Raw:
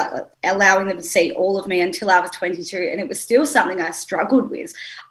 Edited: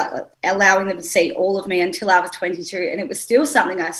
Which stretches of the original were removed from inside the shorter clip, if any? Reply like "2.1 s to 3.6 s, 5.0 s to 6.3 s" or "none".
none